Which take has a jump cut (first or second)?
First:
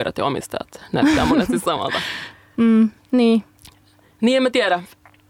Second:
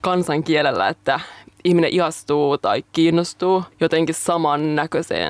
second